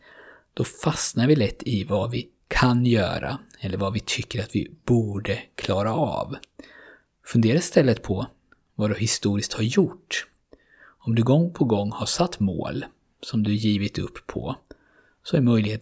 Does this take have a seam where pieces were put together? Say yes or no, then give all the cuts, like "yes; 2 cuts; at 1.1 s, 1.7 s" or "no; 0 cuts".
no; 0 cuts